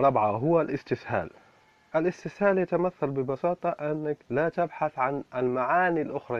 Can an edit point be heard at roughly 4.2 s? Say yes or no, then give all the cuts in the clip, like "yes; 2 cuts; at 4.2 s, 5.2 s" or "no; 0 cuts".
yes; 1 cut; at 4.2 s